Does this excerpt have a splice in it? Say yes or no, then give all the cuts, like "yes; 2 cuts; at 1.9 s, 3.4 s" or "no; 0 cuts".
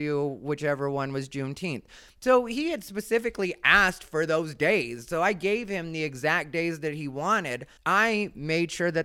yes; 1 cut; at 7.8 s